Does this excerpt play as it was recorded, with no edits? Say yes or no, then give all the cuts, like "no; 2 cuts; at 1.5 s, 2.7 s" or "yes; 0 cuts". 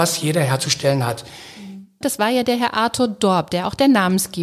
no; 1 cut; at 2.0 s